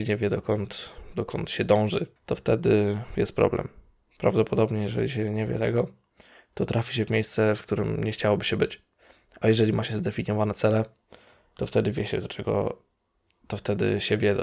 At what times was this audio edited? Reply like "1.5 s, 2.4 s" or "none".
2.2 s